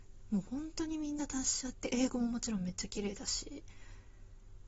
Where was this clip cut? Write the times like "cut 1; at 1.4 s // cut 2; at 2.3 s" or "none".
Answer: cut 1; at 1.7 s